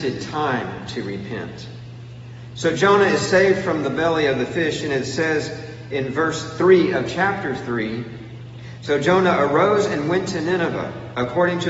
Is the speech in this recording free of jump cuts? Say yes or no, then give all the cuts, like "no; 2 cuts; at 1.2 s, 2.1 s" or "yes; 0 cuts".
yes; 0 cuts